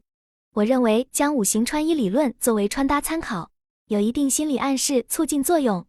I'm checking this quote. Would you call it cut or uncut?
uncut